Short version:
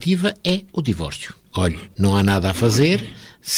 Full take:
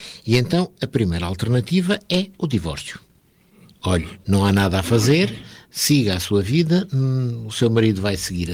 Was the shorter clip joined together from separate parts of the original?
yes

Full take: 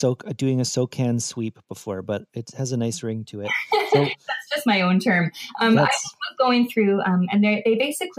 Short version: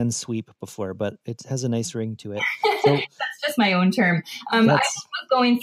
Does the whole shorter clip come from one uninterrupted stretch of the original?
yes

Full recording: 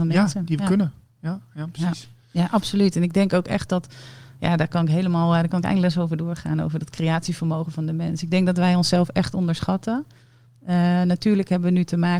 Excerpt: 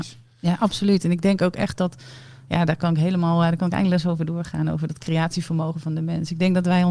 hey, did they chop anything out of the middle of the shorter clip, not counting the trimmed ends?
no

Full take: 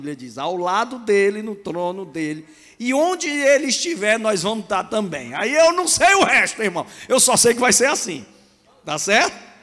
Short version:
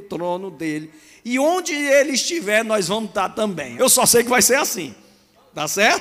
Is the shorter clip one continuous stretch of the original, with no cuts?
no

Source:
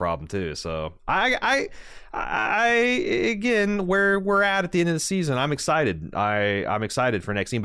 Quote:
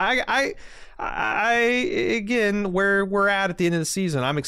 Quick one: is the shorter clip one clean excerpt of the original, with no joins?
yes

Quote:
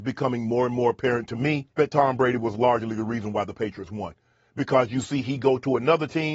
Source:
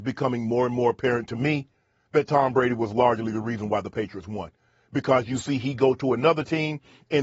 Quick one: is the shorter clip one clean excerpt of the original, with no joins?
no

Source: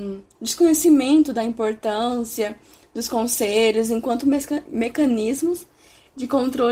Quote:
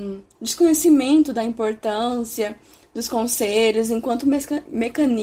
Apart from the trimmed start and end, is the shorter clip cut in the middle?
no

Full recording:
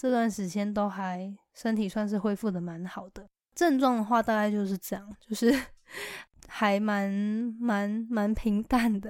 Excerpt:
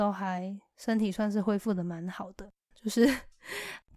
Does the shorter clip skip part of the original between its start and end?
yes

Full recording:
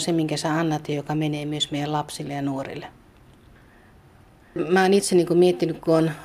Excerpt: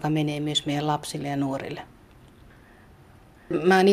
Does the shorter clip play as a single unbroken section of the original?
yes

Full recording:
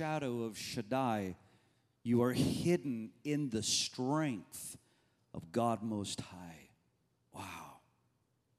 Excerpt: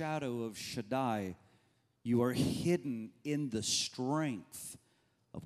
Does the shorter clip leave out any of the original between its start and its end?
no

